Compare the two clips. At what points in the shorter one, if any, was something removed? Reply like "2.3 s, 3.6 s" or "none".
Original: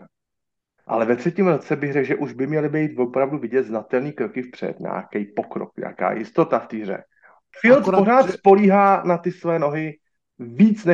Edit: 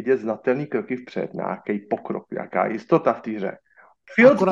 none